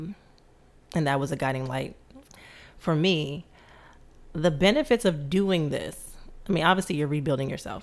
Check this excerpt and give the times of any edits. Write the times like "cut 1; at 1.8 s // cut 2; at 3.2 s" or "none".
none